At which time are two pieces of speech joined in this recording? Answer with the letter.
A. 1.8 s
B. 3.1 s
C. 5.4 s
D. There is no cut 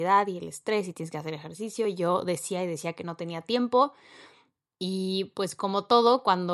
D